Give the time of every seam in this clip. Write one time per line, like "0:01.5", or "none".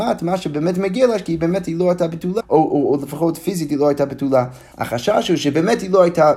0:02.4
0:04.7